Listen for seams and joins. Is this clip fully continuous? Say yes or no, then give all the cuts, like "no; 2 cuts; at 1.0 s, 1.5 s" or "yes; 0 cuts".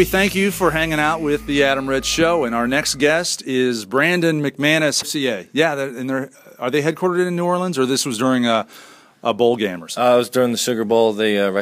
no; 1 cut; at 5.0 s